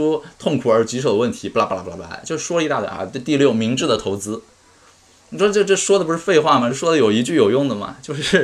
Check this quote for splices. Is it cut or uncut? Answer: uncut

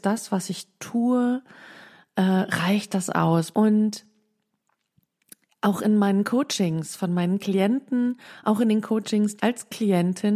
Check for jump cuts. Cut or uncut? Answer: cut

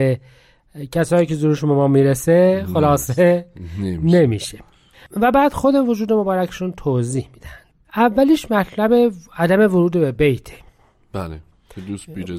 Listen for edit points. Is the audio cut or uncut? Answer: uncut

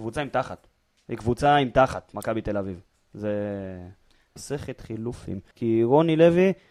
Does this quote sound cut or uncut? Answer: cut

